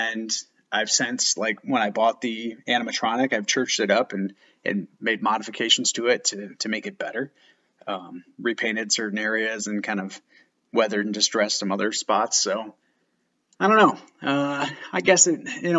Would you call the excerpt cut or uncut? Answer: uncut